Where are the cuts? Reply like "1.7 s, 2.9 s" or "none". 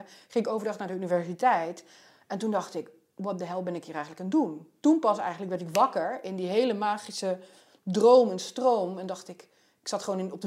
none